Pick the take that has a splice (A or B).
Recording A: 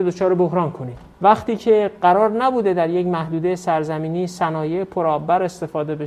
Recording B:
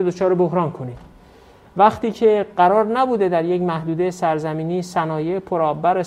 A